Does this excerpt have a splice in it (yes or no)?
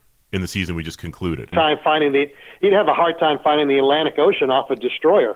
yes